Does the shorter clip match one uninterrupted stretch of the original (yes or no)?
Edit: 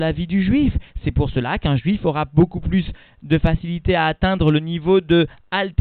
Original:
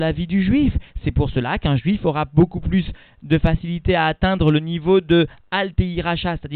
yes